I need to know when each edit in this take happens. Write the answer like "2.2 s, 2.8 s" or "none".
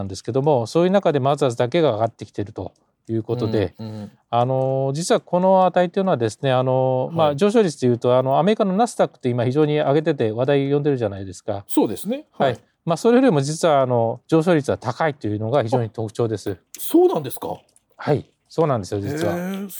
16.7 s